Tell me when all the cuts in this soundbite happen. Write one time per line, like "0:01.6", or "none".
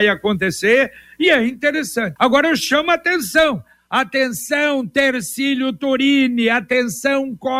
0:02.2